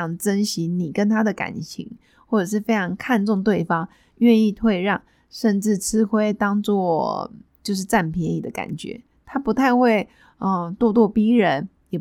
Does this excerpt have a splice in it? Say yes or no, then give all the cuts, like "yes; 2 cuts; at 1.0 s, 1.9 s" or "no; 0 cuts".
no; 0 cuts